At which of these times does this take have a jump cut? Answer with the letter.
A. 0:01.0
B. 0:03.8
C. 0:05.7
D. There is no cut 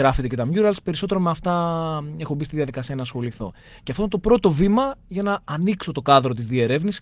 D